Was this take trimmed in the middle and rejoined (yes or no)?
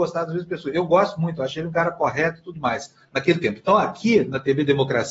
yes